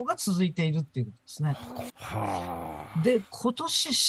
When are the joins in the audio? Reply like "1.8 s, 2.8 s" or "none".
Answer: 1.9 s